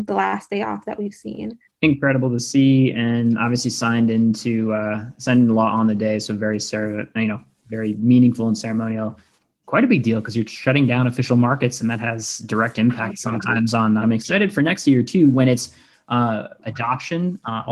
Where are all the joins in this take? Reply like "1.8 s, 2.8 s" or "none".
9.6 s, 14.0 s, 16.6 s